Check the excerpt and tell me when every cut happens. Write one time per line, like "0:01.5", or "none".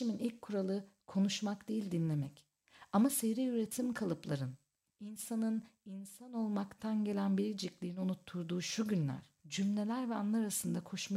0:04.9
0:09.4